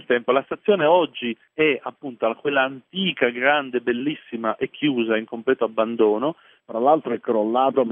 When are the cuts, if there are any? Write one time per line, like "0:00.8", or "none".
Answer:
0:06.6